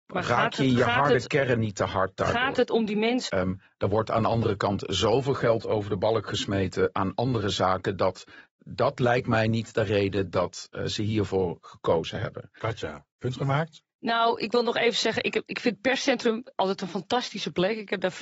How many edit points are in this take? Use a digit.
2